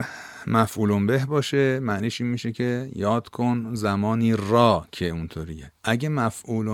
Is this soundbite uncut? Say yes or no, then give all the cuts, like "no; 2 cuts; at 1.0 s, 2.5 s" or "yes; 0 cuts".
no; 1 cut; at 5.8 s